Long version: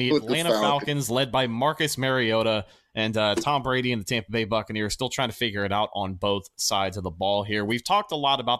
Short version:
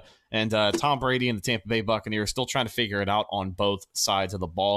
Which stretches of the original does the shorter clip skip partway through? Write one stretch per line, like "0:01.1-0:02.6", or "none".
none